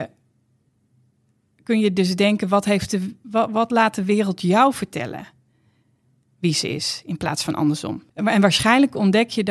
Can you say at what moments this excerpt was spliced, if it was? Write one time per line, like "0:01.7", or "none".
0:08.1